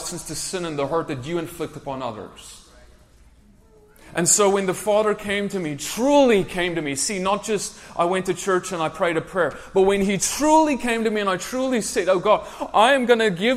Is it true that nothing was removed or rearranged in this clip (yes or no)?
yes